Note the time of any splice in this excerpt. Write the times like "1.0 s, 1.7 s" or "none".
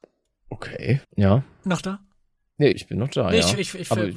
1.0 s, 2.7 s